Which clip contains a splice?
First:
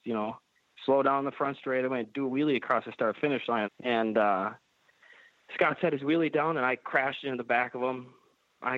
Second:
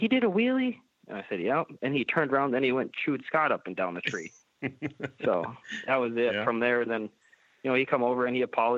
first; 1 cut; at 3.6 s

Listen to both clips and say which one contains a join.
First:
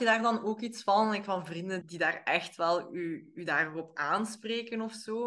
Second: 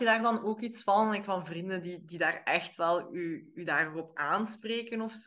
first; 1 cut; at 1.8 s

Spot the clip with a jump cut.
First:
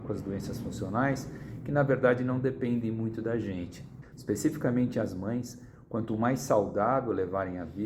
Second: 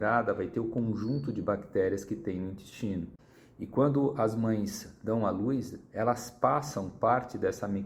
first; 1 cut; at 4.1 s

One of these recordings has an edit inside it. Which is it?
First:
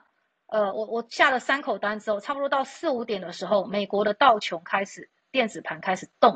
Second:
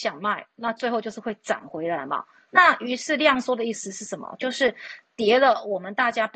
second; 1 cut; at 2.5 s

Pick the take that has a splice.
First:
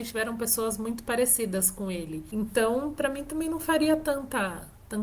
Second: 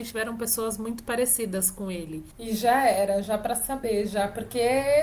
second; 1 cut; at 2.3 s

